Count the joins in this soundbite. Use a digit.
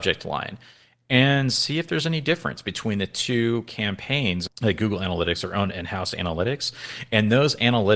1